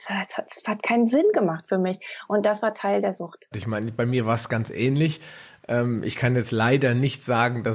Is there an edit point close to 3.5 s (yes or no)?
yes